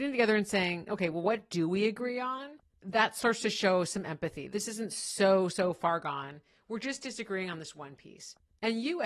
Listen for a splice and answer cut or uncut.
cut